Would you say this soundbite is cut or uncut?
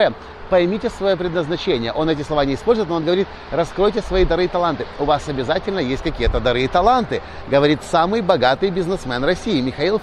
uncut